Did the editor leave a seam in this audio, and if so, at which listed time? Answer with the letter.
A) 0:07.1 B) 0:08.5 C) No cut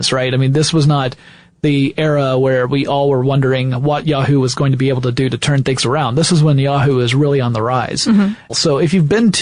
B